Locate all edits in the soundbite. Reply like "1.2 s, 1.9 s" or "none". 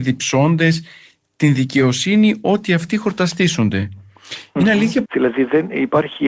5.1 s